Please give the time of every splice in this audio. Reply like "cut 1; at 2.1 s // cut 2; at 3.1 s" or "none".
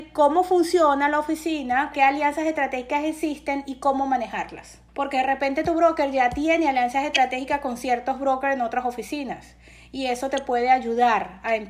cut 1; at 1.9 s // cut 2; at 4.9 s